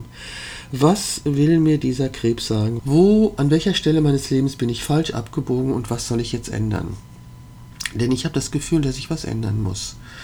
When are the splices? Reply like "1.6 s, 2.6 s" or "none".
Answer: 2.8 s